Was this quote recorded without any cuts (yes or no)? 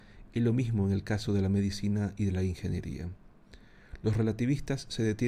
yes